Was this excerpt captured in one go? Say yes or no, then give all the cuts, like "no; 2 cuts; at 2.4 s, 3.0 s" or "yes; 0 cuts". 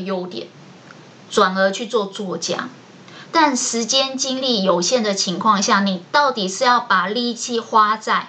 no; 1 cut; at 3.3 s